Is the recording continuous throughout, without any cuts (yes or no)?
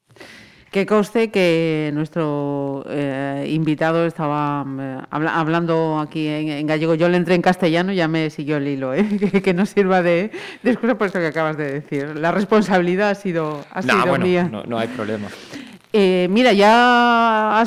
yes